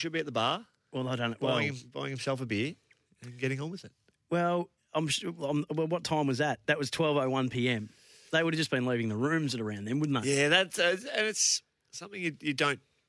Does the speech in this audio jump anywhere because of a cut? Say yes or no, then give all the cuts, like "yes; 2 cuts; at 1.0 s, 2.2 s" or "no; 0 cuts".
no; 0 cuts